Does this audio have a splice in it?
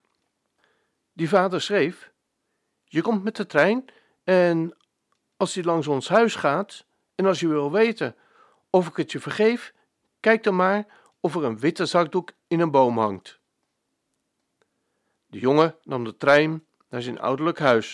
no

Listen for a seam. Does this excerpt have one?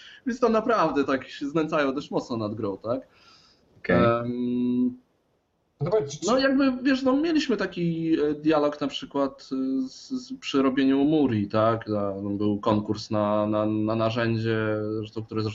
no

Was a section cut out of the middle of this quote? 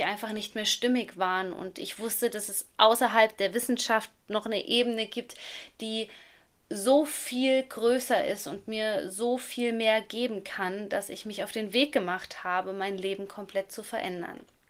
no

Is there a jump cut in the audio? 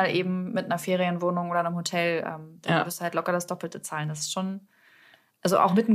no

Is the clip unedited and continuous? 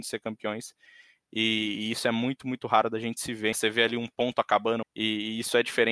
no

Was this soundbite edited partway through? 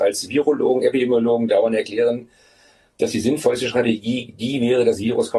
no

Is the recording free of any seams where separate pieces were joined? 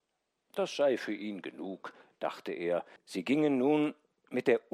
no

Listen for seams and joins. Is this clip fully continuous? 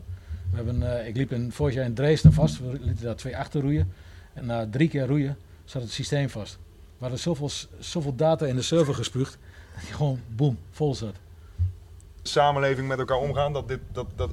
no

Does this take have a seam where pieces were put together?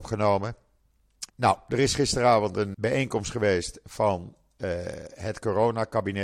yes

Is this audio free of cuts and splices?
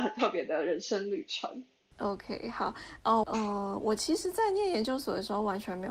no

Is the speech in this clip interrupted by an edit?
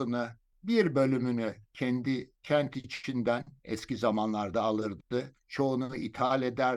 no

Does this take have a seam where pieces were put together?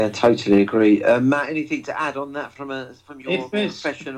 no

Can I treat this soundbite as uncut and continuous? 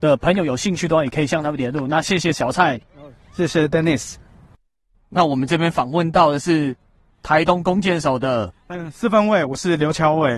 yes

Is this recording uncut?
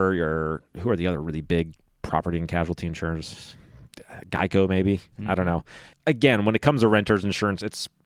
no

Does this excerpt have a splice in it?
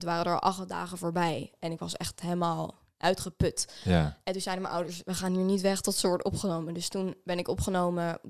no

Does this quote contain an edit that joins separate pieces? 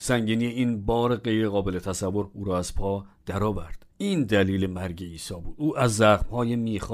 yes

